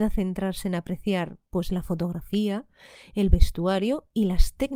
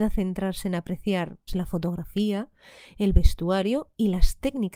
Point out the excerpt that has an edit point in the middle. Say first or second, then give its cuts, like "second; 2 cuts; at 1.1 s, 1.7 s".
second; 1 cut; at 1.5 s